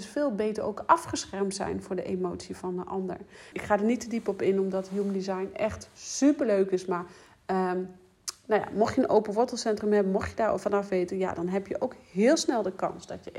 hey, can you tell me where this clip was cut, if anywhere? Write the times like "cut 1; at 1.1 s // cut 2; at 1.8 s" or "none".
cut 1; at 3.5 s